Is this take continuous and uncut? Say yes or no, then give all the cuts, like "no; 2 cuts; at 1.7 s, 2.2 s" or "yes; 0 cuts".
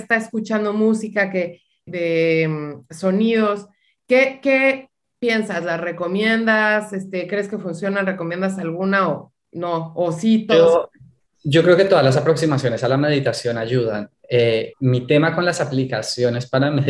no; 2 cuts; at 1.9 s, 14.7 s